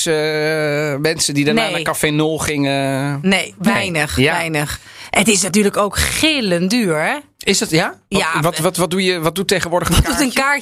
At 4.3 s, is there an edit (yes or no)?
no